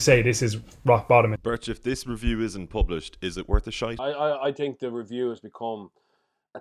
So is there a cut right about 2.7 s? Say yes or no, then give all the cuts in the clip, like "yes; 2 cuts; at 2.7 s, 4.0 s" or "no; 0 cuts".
no; 2 cuts; at 1.4 s, 4.0 s